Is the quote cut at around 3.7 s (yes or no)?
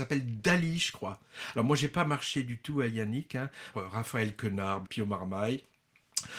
yes